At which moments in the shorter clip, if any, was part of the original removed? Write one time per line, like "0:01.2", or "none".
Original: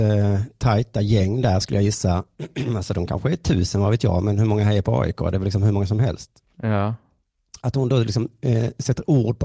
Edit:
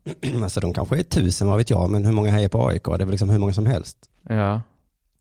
none